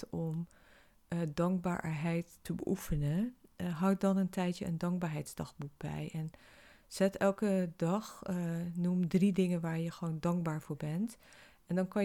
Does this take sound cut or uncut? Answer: uncut